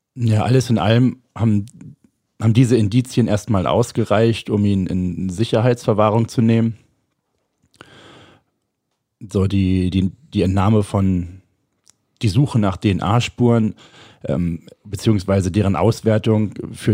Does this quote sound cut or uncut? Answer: uncut